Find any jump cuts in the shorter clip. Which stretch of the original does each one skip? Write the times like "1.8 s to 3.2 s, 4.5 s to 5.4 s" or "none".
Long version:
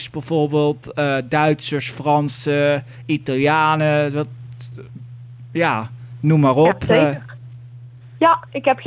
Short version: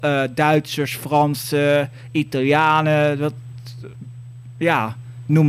none